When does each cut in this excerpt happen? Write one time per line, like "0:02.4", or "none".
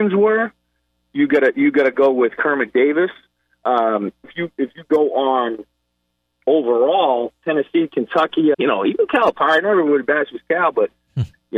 0:04.2
0:08.5